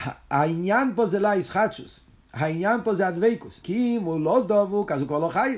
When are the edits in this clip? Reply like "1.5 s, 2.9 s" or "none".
3.6 s

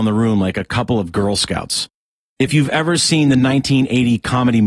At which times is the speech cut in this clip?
none

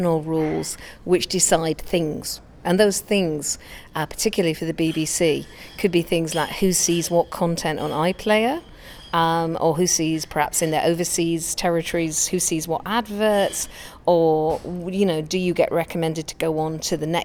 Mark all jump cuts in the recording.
none

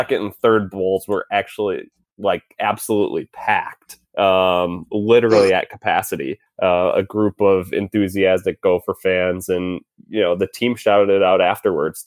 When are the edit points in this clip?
6.5 s

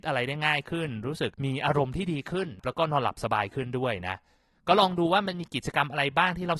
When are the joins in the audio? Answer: 1.3 s

